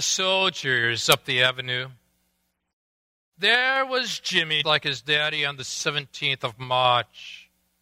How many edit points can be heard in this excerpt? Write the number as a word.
one